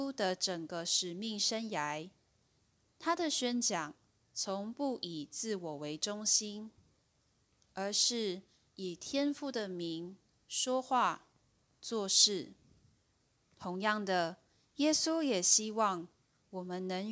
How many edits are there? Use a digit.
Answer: 1